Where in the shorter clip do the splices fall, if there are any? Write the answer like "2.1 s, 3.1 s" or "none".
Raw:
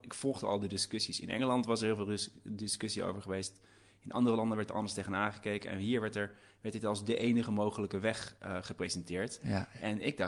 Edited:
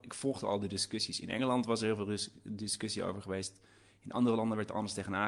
none